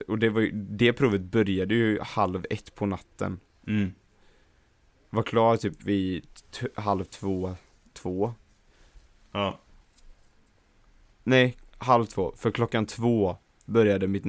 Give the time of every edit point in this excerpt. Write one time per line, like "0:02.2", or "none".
none